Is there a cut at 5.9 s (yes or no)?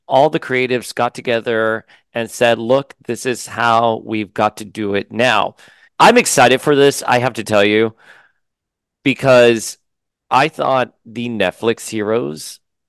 yes